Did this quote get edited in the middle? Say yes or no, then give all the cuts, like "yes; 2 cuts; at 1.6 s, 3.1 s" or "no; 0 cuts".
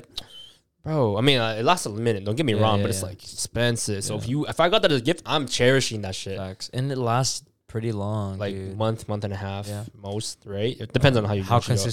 no; 0 cuts